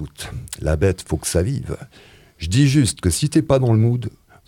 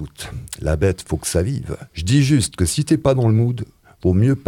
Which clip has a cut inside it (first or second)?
second